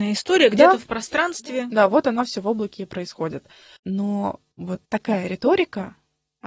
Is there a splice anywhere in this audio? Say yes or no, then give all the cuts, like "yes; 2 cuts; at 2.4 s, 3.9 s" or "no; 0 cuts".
yes; 2 cuts; at 3.8 s, 4.9 s